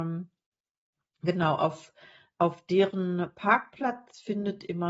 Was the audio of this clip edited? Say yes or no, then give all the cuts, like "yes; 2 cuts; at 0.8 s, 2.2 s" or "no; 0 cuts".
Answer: no; 0 cuts